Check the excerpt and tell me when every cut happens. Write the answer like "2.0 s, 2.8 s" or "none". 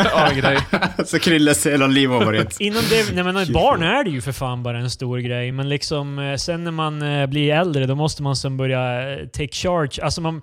none